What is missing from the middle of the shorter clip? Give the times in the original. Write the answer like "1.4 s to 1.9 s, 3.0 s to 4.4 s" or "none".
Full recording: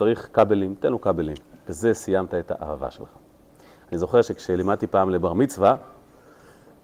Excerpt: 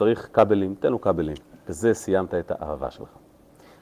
none